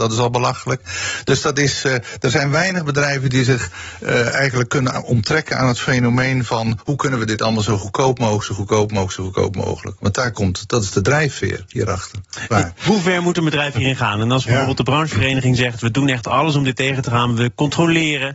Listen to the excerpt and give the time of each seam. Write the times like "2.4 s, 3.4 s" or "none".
12.8 s